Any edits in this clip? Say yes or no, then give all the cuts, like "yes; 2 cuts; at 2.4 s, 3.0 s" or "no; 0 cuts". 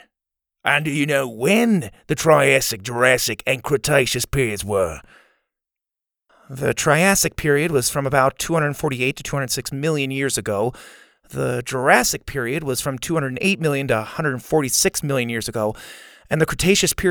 no; 0 cuts